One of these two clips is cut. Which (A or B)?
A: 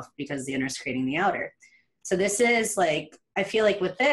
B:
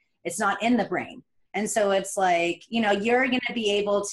B